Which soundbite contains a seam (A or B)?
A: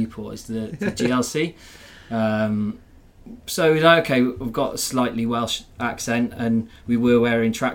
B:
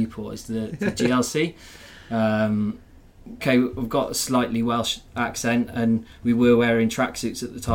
B